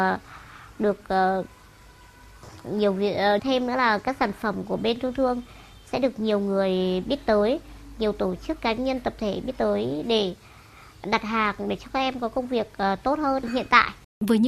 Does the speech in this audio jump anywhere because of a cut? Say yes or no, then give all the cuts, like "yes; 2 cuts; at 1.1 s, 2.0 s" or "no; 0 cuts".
yes; 1 cut; at 3.4 s